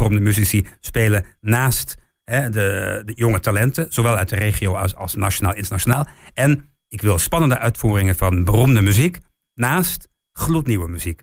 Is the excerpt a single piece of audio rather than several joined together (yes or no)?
yes